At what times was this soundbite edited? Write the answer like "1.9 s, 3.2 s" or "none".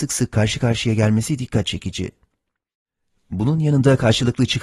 none